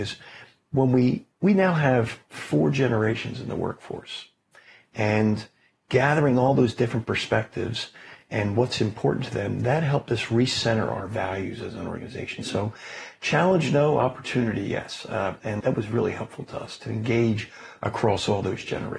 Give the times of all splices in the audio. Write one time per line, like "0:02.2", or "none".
0:15.6